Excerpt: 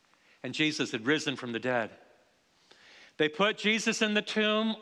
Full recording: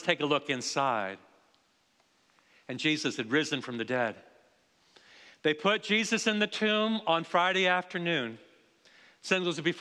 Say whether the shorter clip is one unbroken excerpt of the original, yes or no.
yes